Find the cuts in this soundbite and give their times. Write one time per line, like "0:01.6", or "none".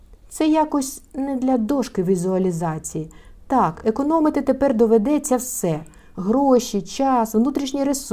none